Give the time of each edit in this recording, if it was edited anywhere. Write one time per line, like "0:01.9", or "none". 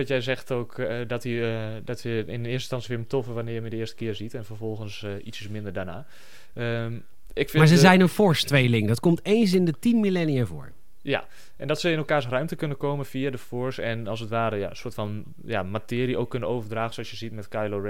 none